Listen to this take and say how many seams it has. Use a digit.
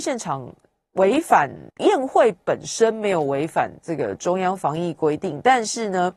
1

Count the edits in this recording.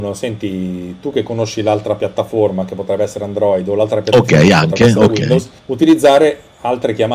1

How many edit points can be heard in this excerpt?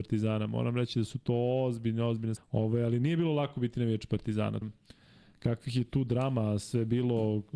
2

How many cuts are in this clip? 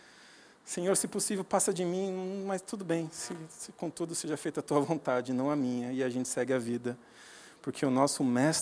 0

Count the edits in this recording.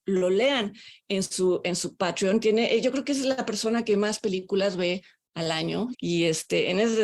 1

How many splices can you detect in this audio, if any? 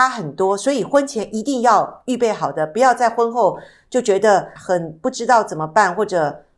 1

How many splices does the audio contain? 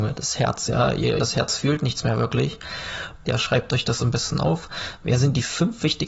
2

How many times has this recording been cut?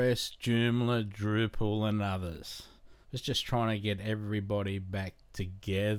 1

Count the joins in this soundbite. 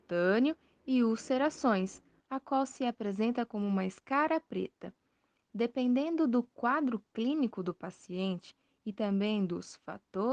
1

